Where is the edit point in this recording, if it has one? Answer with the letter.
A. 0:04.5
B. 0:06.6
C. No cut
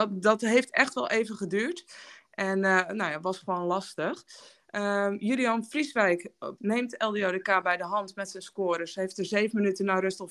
B